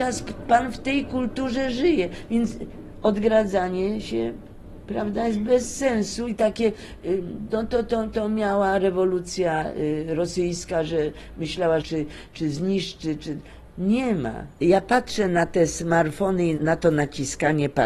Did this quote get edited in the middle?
yes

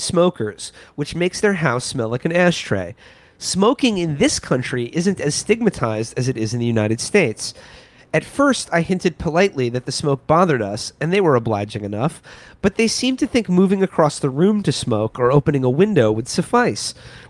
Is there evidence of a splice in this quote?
no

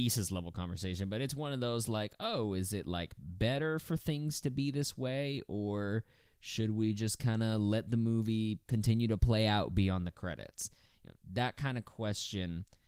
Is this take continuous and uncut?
yes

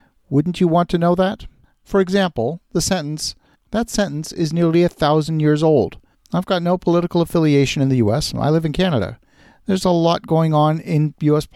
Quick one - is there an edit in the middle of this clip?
yes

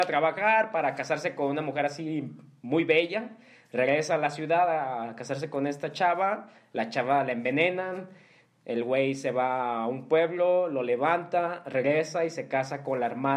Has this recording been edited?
no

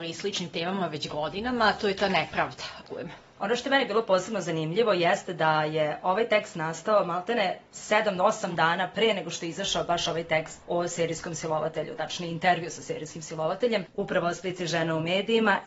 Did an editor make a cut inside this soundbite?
yes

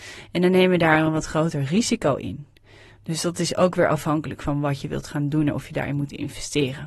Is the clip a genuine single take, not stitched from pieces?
yes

